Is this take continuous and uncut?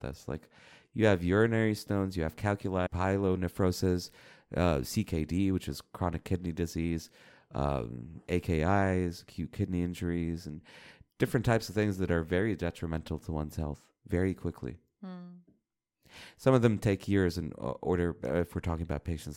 no; 1 cut; at 2.9 s

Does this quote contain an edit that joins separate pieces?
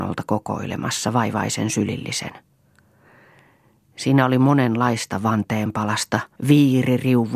yes; 1 cut; at 6.4 s

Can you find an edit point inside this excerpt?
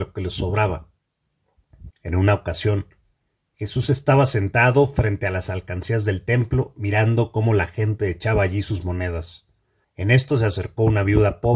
yes; 2 cuts; at 1.9 s, 9.8 s

